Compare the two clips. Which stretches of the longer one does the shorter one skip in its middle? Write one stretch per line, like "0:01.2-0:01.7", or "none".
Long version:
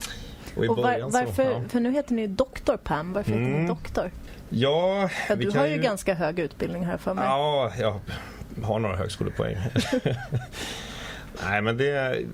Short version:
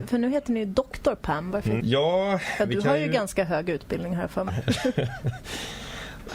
0:03.4-0:04.5
0:07.2-0:09.6